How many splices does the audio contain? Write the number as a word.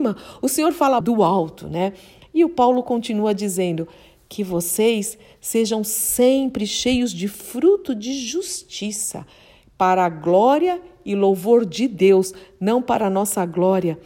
two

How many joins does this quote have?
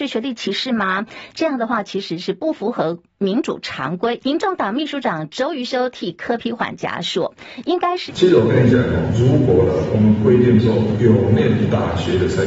two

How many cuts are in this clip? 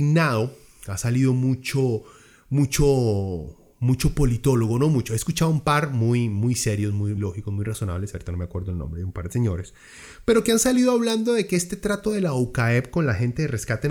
one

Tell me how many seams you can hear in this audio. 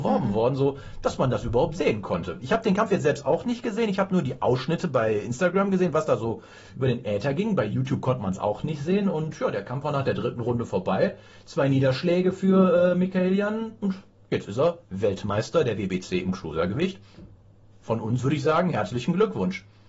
zero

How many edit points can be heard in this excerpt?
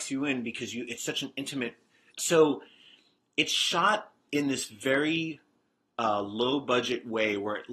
one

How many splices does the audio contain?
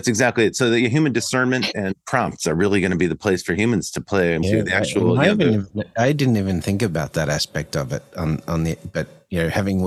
one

